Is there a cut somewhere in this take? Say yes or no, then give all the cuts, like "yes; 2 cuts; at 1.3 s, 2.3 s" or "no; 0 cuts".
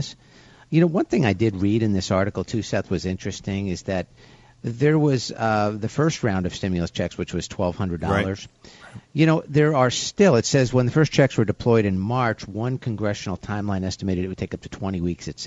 no; 0 cuts